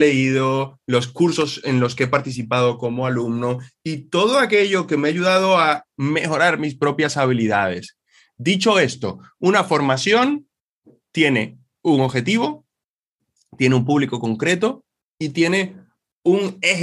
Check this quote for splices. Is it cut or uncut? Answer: uncut